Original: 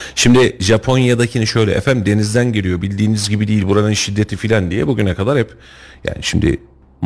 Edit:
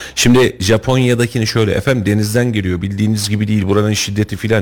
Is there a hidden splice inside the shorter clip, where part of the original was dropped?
no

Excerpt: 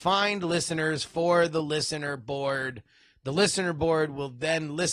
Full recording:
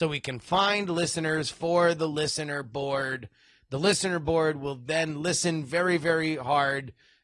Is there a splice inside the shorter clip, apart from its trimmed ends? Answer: no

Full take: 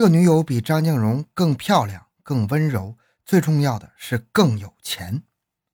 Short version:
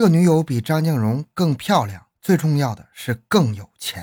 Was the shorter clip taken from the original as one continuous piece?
no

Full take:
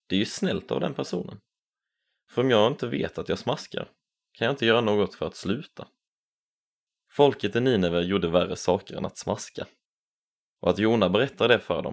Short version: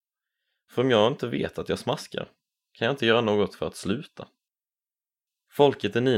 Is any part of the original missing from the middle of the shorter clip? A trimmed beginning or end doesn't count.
no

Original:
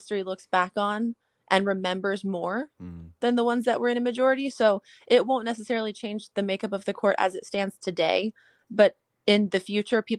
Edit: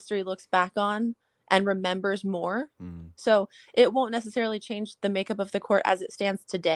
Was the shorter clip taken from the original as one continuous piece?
no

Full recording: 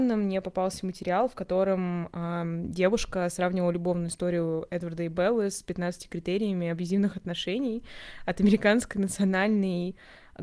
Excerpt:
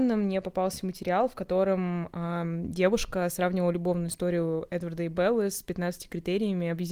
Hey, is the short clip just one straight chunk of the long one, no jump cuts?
yes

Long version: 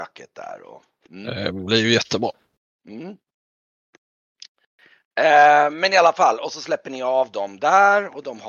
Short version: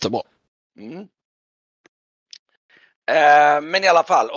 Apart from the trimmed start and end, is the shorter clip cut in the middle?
no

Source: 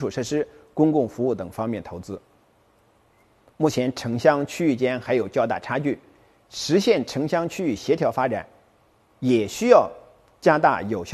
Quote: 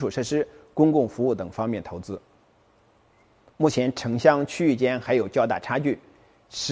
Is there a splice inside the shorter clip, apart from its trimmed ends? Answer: no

